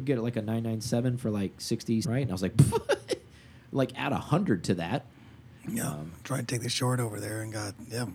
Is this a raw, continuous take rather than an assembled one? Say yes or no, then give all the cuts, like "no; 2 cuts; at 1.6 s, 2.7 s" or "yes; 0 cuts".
no; 2 cuts; at 2.0 s, 5.6 s